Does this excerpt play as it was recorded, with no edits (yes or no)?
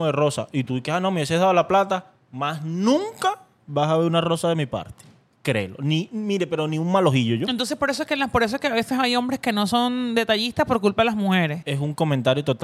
no